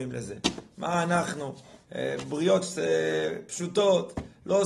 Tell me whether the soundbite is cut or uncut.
uncut